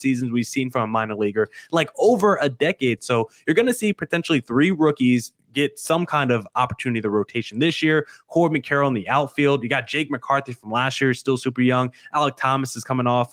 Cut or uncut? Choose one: uncut